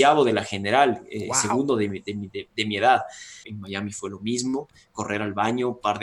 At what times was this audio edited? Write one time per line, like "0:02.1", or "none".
0:03.4